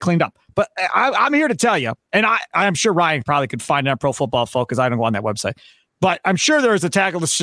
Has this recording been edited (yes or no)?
no